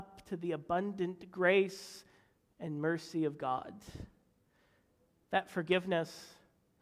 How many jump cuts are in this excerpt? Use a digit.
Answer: 1